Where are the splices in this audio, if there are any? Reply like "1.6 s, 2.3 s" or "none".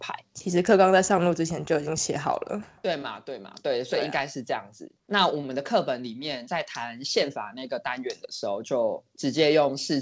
5.0 s

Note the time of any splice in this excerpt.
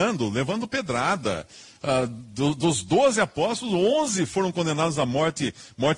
none

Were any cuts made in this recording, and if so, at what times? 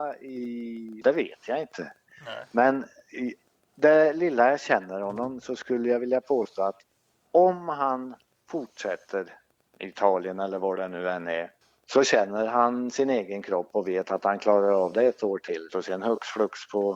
1.0 s, 15.7 s

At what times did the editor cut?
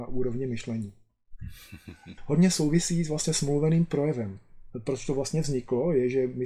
2.2 s

